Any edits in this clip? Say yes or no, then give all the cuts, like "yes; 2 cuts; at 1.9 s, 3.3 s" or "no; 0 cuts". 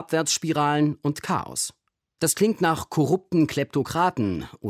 yes; 1 cut; at 2.2 s